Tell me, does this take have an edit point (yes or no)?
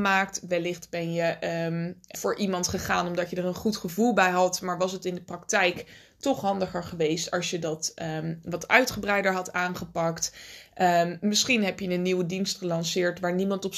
yes